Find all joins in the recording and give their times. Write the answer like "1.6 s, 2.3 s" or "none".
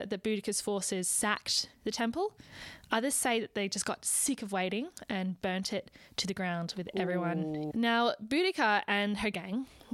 7.7 s

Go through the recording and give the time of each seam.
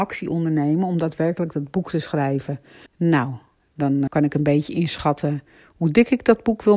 2.9 s, 4.1 s

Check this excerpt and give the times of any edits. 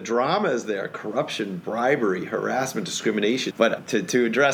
3.5 s

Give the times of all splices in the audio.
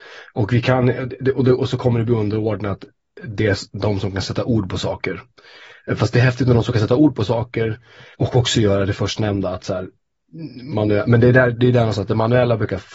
8.1 s

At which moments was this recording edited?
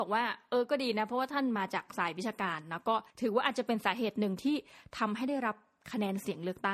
3.1 s

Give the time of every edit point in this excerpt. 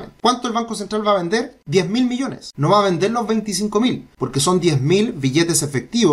none

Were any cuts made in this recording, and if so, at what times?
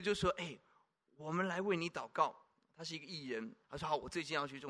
3.6 s

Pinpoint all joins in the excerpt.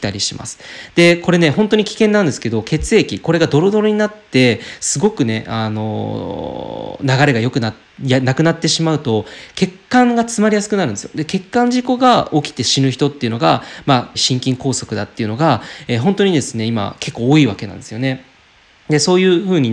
14.1 s

